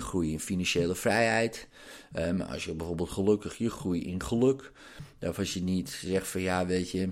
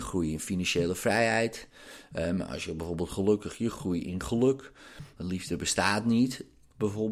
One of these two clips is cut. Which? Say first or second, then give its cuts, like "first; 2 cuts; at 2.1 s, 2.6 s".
second; 1 cut; at 5.2 s